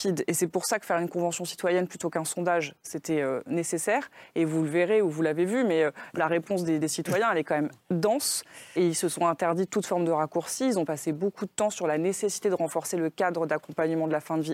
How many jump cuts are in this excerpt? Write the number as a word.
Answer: one